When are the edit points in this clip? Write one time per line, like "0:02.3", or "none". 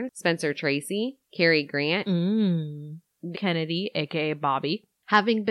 0:03.3